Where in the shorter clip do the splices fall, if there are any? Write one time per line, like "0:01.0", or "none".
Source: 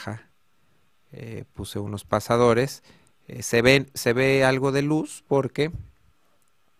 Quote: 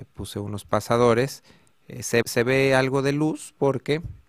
0:02.2